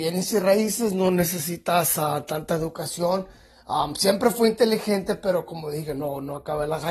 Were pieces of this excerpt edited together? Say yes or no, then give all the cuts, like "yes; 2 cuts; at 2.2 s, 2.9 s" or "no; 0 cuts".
no; 0 cuts